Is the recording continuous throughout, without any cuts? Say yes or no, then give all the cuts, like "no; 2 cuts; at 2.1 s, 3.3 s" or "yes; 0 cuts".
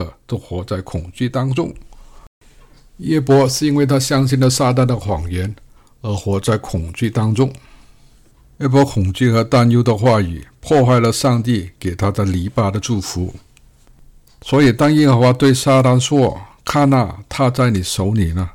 yes; 0 cuts